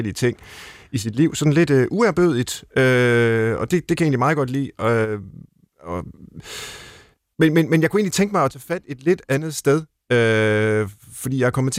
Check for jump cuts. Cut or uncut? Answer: uncut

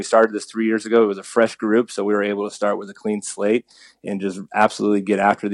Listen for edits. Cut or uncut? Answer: uncut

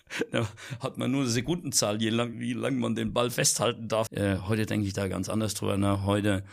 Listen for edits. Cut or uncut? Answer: cut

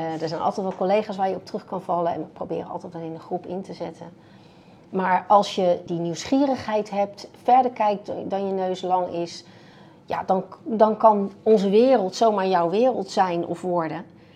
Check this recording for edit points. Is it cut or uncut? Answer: cut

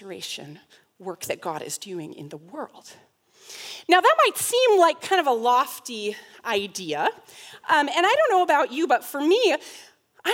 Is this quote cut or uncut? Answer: uncut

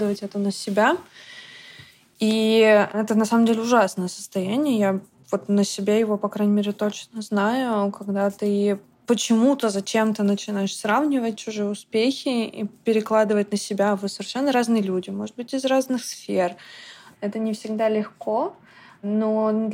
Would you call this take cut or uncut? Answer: cut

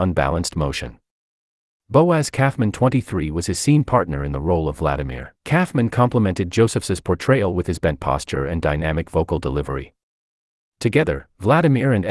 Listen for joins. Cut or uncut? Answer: cut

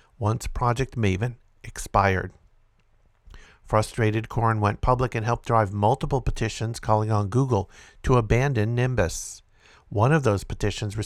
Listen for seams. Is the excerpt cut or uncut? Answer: cut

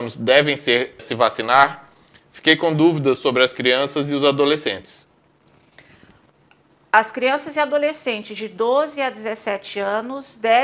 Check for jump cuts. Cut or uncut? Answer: cut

